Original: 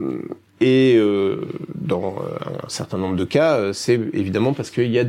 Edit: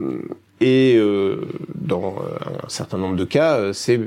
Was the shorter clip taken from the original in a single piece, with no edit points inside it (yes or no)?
yes